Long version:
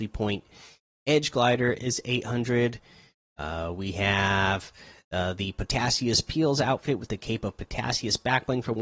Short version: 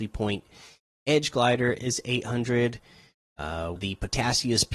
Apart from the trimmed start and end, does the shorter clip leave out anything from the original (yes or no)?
yes